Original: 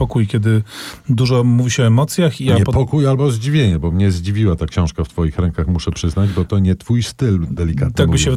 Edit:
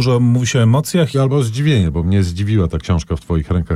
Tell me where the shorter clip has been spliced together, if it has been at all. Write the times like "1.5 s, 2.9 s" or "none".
1.1 s